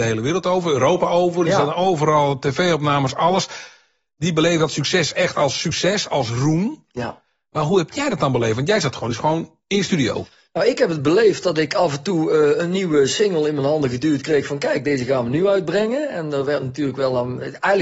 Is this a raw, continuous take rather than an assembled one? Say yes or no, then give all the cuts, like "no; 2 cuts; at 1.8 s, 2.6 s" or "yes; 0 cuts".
yes; 0 cuts